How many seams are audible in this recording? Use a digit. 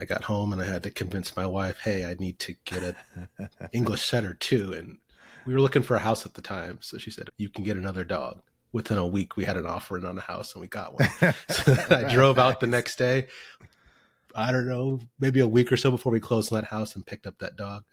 1